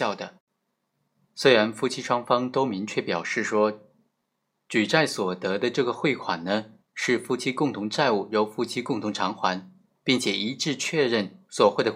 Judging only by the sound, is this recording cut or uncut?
uncut